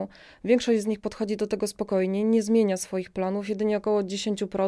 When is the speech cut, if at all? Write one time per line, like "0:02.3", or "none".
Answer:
none